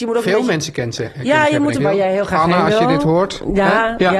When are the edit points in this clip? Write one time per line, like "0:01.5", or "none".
0:01.8